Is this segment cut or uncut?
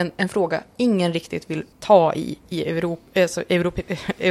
cut